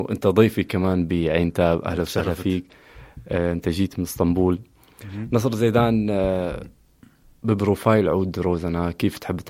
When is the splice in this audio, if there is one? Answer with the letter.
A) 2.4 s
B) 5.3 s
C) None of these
C